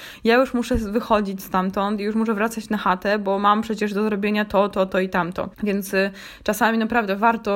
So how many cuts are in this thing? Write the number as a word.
one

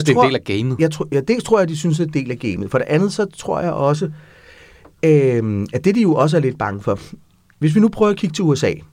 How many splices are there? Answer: zero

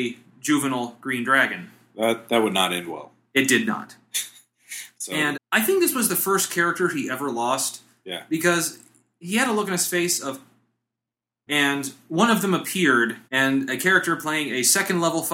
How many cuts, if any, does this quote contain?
three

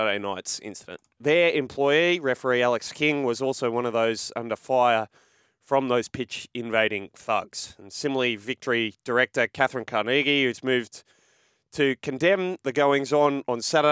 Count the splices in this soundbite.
one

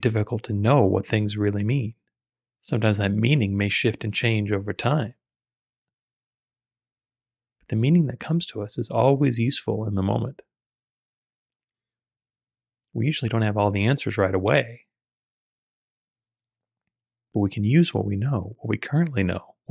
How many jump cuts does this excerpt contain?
zero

